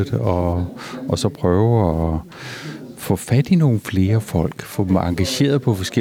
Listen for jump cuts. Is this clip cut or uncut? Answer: uncut